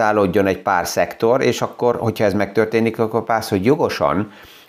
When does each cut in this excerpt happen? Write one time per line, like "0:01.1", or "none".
none